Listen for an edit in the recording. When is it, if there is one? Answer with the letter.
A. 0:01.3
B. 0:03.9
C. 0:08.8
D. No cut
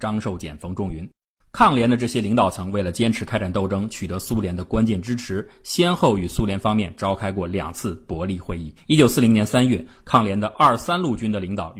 C